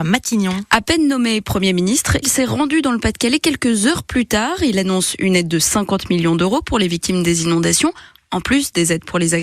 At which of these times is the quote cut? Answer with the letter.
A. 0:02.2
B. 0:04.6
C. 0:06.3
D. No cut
A